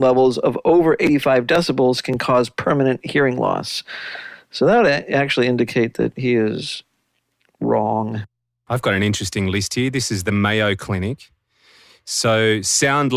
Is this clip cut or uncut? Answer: uncut